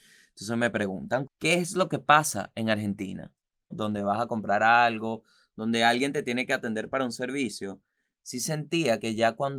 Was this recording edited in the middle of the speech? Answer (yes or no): yes